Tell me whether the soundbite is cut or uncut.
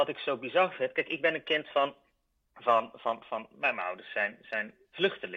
uncut